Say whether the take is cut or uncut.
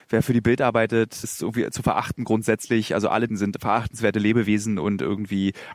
cut